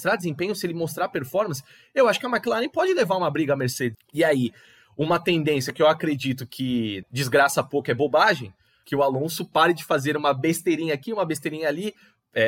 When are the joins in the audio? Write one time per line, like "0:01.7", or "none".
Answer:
0:03.9
0:07.0
0:08.8